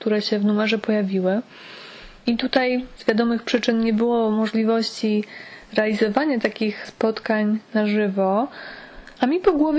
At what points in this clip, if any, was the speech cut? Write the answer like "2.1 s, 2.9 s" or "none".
none